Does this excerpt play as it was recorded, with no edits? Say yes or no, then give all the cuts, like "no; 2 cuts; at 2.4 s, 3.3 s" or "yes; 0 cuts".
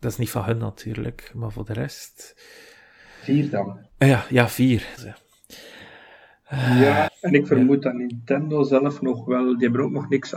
no; 3 cuts; at 3.9 s, 5.0 s, 7.1 s